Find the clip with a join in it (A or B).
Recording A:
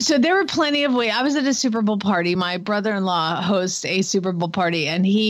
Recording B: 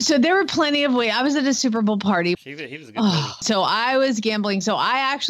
B